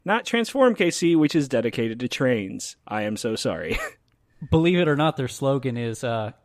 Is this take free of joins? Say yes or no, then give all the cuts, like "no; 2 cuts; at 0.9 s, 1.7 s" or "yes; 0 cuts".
yes; 0 cuts